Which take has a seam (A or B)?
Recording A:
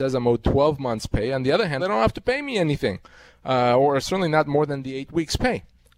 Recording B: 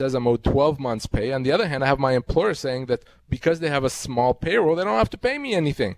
A